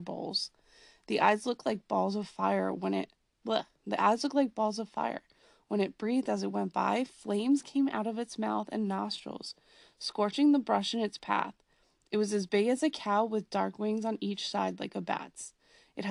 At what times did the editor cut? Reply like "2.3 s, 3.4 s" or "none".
none